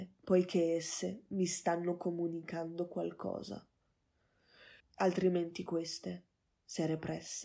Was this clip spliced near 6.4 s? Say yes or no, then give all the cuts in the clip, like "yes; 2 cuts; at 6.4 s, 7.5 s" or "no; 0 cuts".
no; 1 cut; at 4.8 s